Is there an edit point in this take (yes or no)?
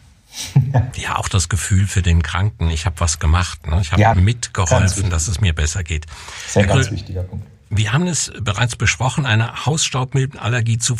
yes